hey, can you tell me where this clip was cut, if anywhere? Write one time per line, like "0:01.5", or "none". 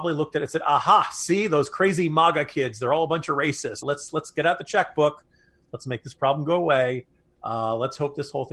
0:03.8